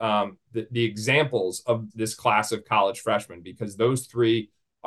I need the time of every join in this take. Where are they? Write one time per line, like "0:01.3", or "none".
0:01.9